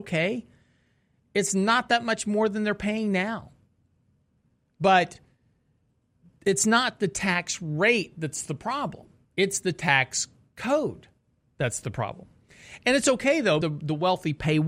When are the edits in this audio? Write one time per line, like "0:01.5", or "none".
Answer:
0:13.6